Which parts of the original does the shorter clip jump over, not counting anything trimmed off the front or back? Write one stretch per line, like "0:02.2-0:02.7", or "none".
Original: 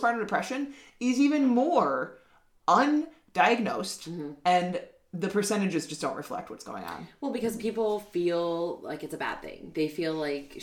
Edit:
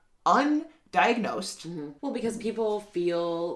0:04.4-0:07.2